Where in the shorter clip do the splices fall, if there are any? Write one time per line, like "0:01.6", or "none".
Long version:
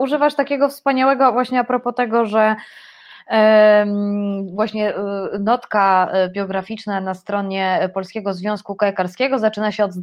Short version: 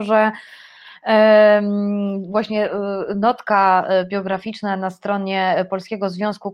none